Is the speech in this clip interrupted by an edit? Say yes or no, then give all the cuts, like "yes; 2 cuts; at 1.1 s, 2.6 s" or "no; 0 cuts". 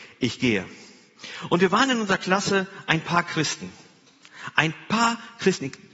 no; 0 cuts